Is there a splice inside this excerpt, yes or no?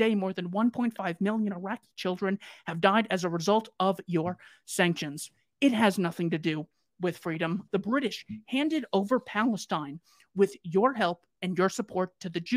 yes